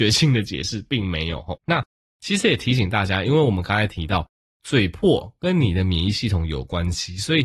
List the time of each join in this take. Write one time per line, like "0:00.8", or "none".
0:01.6